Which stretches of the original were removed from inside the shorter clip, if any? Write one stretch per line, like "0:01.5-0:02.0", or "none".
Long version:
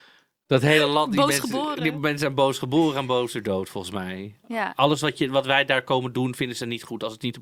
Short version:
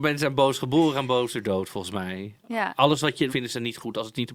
0:05.3-0:06.4